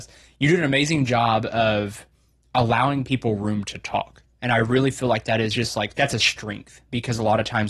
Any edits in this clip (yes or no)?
no